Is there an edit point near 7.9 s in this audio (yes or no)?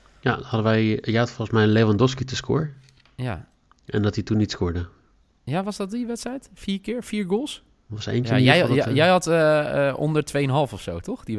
yes